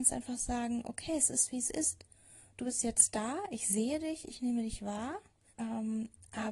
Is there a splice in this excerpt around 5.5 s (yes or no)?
yes